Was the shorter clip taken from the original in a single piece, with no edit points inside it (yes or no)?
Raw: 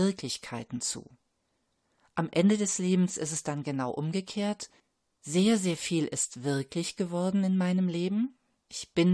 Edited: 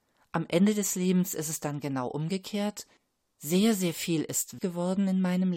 no